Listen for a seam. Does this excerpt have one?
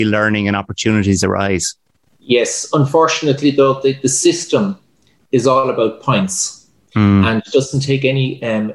no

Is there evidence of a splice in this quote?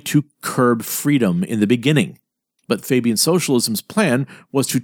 yes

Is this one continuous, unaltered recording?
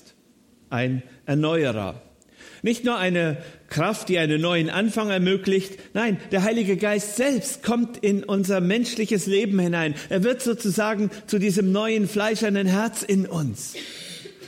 yes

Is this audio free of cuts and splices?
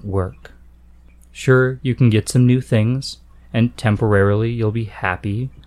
yes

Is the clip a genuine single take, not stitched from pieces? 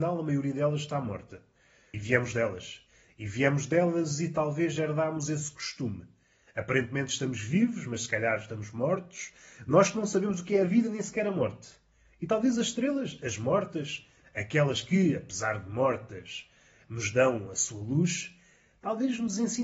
yes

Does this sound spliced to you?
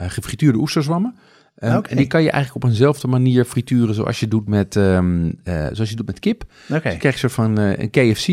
no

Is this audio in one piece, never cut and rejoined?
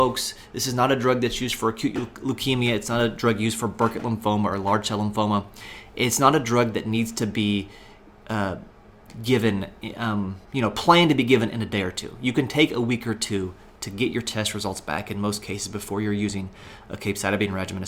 no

